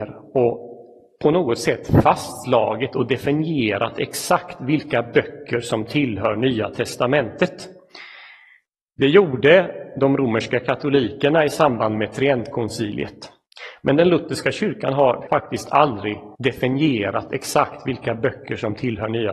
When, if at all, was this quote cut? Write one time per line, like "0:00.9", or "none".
0:15.3
0:16.3